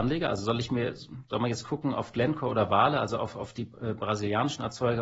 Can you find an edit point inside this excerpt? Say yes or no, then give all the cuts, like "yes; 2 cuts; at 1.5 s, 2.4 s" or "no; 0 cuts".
no; 0 cuts